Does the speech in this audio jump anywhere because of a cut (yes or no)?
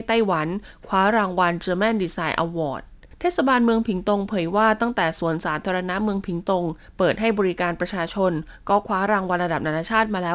no